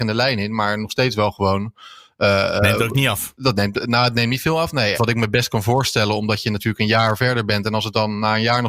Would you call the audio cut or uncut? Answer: cut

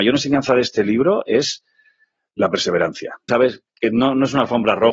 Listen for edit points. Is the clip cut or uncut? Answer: cut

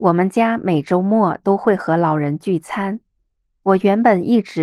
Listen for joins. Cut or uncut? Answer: uncut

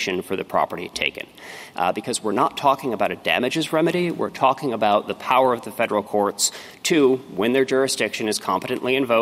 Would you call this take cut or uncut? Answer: cut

